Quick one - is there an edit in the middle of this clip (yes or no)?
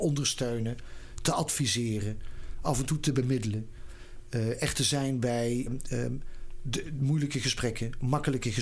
yes